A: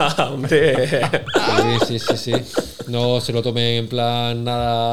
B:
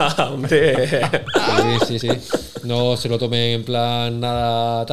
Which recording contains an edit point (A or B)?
B